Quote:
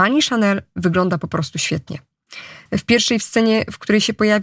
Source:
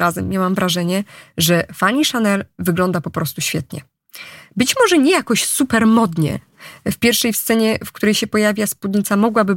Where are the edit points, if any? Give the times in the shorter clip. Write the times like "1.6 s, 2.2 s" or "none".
2.7 s

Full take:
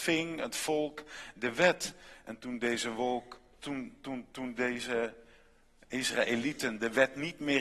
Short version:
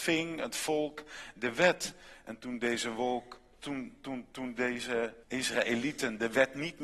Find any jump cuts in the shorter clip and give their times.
5.2 s

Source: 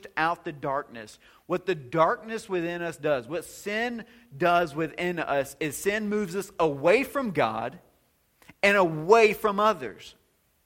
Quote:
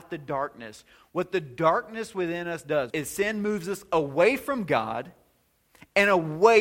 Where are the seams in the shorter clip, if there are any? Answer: 2.9 s

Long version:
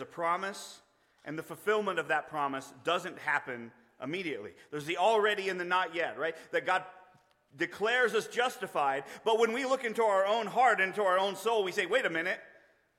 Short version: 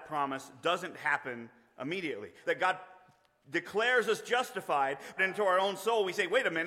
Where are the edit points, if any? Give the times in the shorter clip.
2.4 s, 5.2 s

